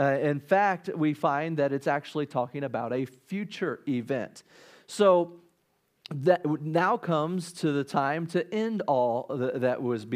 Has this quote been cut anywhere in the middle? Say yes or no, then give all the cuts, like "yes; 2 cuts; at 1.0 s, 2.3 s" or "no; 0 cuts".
no; 0 cuts